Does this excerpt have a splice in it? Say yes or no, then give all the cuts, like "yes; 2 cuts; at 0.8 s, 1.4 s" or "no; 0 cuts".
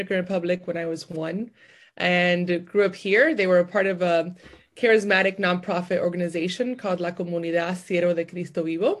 no; 0 cuts